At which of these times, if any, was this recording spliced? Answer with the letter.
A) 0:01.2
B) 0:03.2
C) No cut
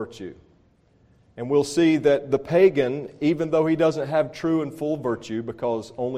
C